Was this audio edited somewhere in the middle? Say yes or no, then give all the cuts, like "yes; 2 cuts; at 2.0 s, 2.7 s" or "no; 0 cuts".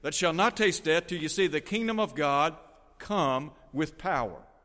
no; 0 cuts